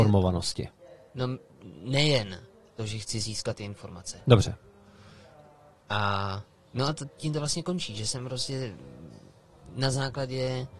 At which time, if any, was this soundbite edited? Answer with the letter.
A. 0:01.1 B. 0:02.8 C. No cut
B